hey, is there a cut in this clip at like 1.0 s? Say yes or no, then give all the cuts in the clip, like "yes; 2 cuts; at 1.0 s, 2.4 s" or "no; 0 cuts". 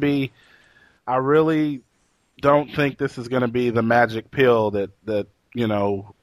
yes; 1 cut; at 1.0 s